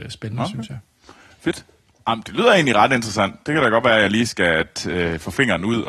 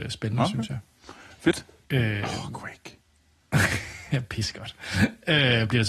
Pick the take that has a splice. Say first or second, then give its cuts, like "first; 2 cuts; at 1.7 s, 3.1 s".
second; 1 cut; at 1.8 s